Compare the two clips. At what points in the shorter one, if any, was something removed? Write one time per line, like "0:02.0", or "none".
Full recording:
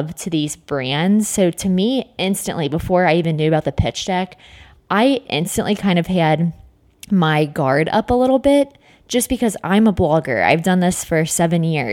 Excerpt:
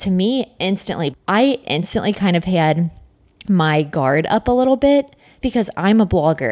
0:01.1
0:05.4